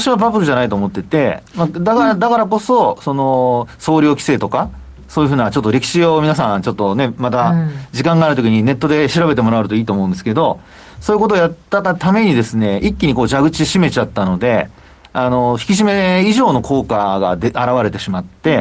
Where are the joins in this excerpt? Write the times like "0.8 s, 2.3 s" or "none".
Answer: none